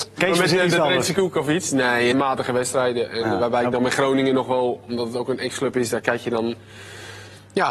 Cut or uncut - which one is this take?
cut